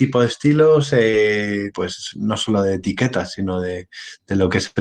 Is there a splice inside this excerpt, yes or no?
yes